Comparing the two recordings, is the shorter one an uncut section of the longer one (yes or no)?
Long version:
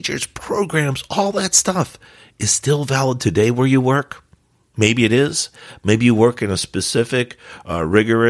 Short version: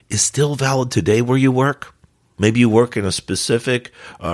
no